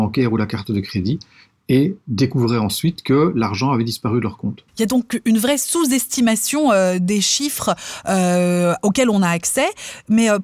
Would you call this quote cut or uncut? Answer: cut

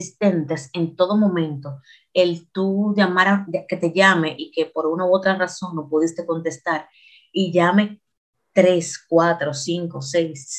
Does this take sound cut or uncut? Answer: uncut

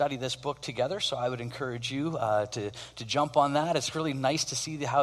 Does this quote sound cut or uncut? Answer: uncut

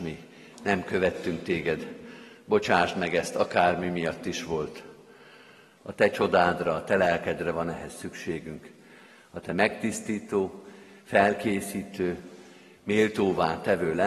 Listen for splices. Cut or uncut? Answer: cut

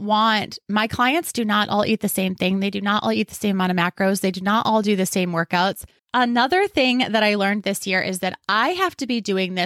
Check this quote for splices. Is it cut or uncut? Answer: cut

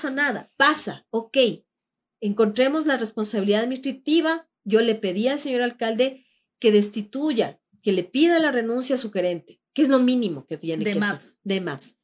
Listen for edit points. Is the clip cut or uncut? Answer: uncut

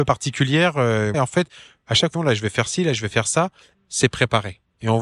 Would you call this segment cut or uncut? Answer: cut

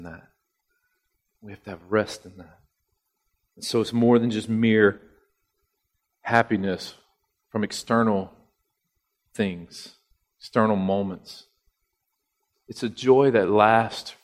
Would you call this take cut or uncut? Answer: cut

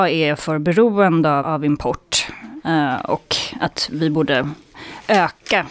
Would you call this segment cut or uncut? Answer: cut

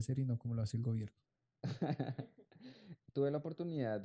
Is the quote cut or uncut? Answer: cut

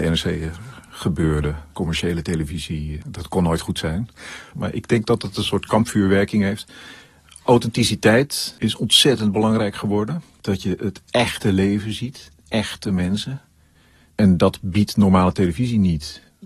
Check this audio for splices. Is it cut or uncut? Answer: cut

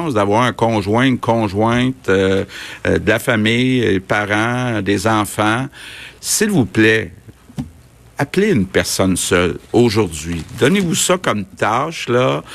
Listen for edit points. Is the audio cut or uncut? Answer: uncut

